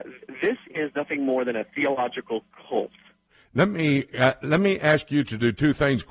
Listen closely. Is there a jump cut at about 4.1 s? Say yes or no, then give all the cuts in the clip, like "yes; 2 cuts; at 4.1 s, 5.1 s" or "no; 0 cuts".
no; 0 cuts